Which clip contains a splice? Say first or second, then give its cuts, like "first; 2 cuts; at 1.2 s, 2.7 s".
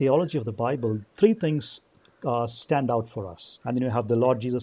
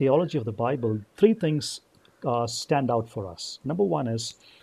first; 1 cut; at 3.6 s